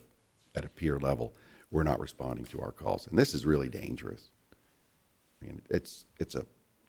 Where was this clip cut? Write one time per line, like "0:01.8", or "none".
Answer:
0:05.4